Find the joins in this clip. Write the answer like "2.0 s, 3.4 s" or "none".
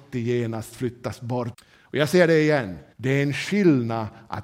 1.5 s, 2.9 s